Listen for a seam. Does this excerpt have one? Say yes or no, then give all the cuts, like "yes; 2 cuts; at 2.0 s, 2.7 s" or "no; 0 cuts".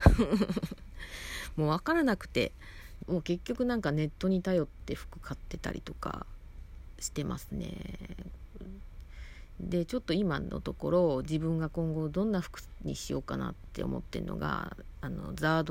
yes; 1 cut; at 3.0 s